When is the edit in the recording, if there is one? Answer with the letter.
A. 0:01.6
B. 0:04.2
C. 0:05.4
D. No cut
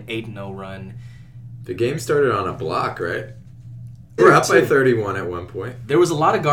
B